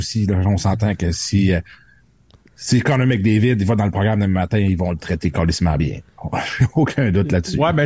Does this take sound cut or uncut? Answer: uncut